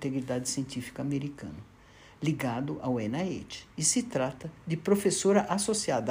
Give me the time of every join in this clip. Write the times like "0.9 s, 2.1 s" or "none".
none